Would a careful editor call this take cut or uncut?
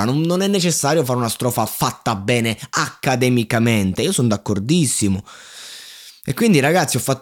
uncut